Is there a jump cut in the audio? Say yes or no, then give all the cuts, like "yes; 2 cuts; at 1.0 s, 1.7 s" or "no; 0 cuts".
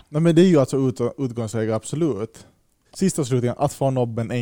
no; 0 cuts